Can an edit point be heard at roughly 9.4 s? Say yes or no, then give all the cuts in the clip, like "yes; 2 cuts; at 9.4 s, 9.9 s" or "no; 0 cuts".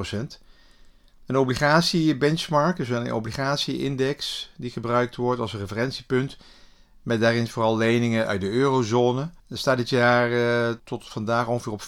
yes; 2 cuts; at 9.4 s, 10.8 s